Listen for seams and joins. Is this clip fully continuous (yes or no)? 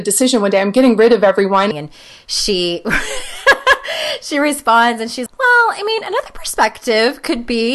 no